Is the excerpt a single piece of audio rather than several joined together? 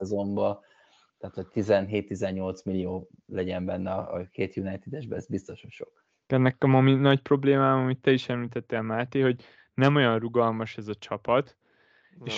no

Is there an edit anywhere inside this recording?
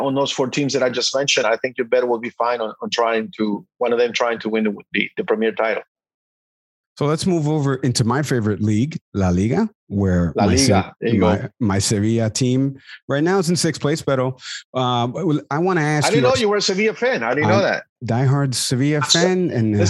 no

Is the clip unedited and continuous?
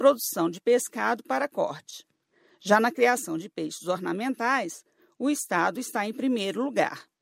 yes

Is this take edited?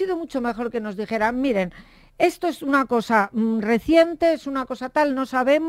no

